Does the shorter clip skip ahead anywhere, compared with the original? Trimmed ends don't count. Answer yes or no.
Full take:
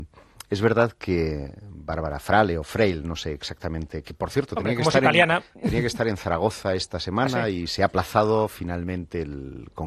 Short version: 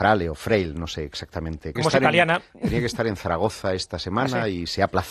yes